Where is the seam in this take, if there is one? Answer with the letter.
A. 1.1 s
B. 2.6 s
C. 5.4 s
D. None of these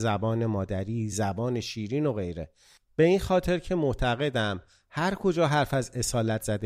A